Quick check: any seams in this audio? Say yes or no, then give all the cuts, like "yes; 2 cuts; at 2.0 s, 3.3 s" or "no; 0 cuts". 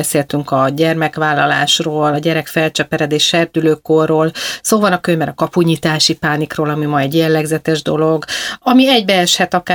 no; 0 cuts